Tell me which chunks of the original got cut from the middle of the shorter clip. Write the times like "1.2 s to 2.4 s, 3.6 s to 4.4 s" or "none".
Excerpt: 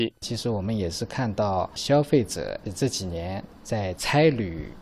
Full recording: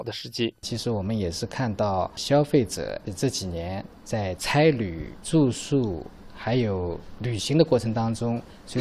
none

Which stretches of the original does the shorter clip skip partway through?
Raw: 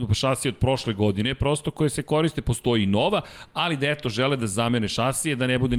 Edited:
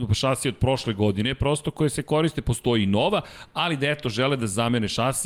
none

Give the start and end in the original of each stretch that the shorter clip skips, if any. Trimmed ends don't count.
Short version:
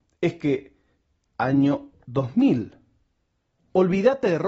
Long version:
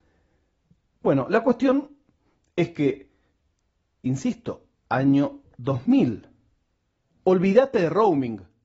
3.6 s to 4.8 s

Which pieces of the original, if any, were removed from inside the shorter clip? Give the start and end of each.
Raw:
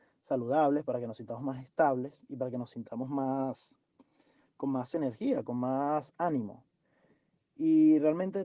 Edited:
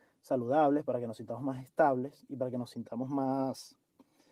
none

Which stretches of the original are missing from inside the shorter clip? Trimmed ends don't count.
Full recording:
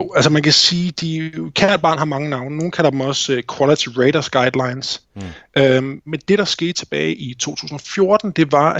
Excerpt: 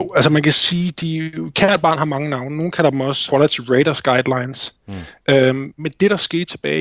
3.3 s to 3.6 s

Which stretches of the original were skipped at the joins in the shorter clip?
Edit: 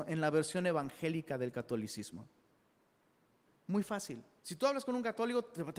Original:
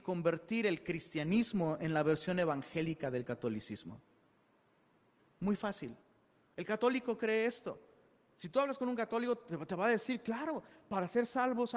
6.1 s to 8.3 s

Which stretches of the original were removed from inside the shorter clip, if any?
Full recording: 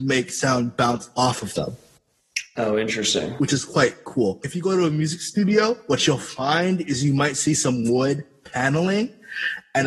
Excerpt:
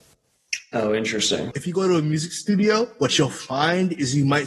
3.3 s to 4.4 s

